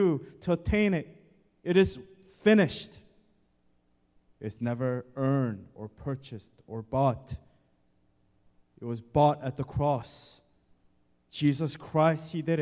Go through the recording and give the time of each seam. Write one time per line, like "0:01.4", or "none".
0:04.4